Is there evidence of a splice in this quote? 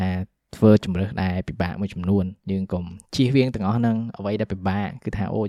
yes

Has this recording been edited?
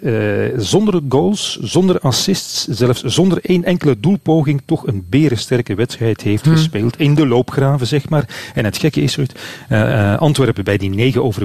no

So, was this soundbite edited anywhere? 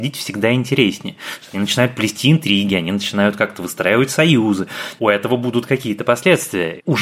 yes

